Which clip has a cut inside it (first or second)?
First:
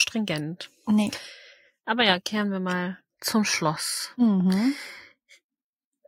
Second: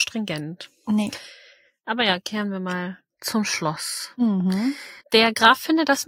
second